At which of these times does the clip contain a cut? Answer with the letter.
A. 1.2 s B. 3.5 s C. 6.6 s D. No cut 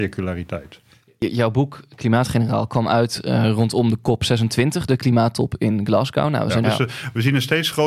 C